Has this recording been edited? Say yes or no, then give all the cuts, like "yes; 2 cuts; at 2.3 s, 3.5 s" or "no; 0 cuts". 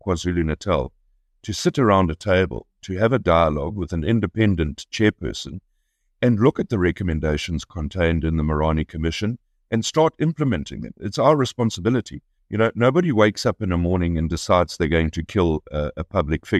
yes; 1 cut; at 12.4 s